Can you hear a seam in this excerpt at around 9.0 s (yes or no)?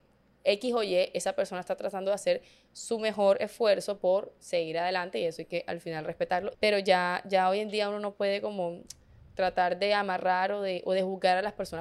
no